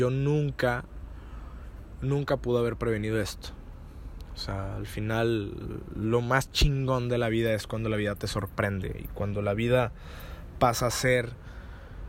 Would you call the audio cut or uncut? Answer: uncut